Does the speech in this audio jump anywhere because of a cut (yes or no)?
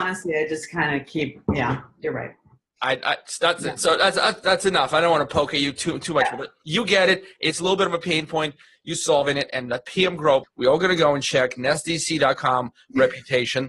yes